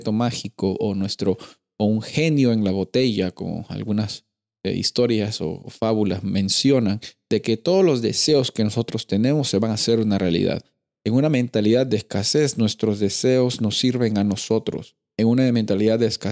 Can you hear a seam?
no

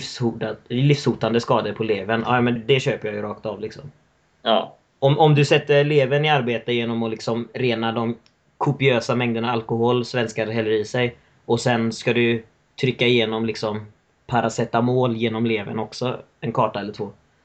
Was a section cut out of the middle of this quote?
yes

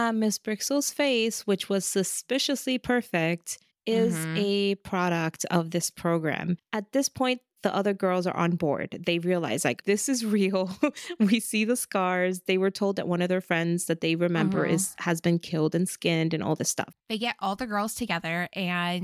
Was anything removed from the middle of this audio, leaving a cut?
yes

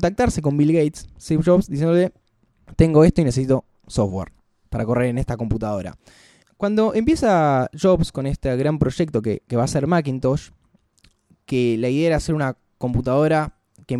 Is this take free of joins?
yes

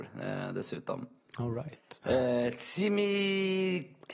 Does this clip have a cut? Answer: no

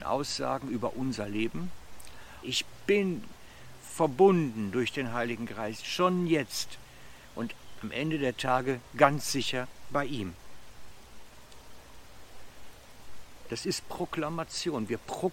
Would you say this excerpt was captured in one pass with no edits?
no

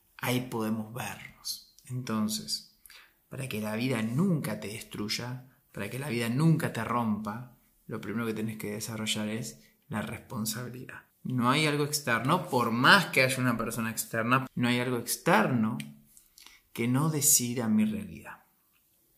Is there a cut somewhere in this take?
yes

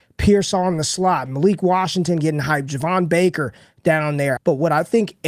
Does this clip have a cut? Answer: yes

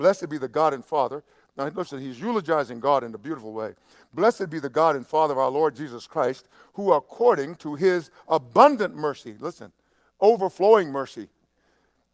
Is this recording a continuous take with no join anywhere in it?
yes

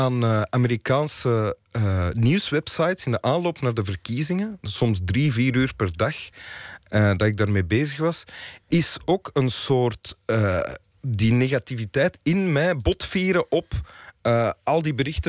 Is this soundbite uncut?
yes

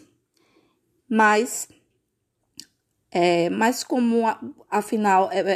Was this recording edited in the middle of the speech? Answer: yes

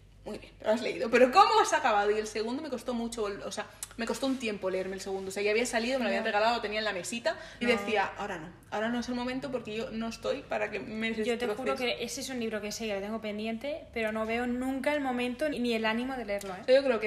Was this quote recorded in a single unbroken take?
no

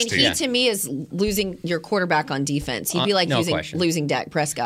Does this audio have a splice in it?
no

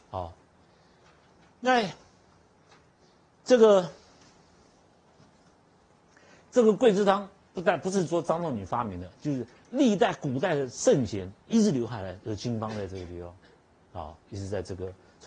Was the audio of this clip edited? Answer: no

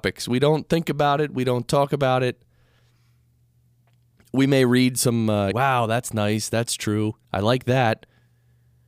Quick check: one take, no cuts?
no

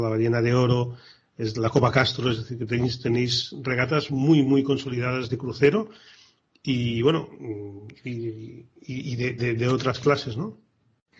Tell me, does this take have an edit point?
no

